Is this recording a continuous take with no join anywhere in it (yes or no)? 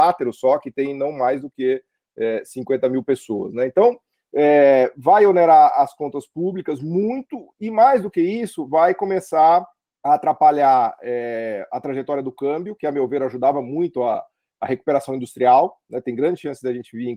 yes